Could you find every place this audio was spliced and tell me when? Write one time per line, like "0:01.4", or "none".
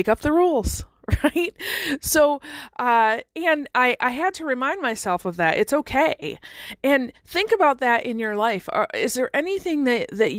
none